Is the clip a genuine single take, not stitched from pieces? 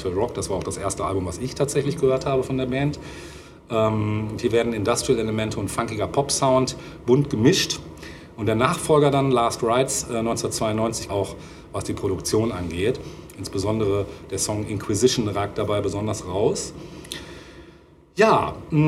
no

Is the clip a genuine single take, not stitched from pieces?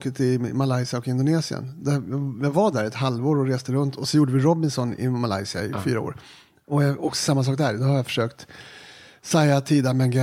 yes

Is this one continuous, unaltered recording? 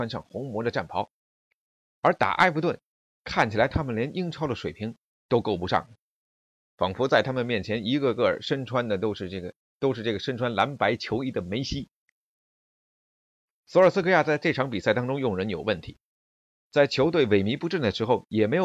yes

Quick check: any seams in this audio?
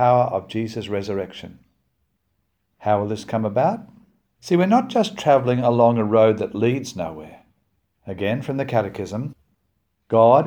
yes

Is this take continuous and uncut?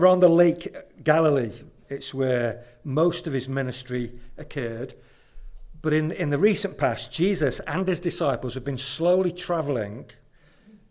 no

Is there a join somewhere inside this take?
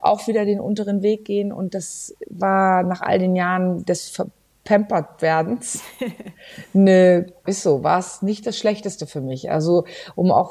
yes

